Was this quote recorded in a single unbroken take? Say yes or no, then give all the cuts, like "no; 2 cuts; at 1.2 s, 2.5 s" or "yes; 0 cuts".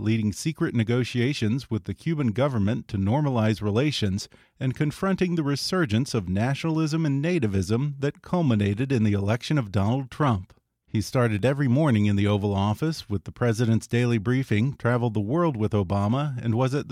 no; 1 cut; at 10.8 s